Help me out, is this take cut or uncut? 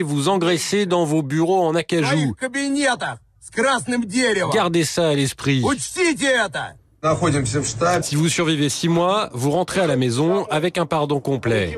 cut